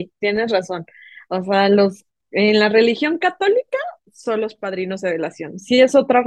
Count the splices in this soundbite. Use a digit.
0